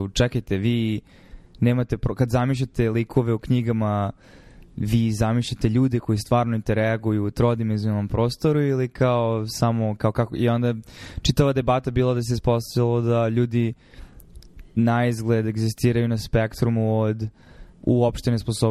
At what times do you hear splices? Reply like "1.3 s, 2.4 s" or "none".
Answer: 17.7 s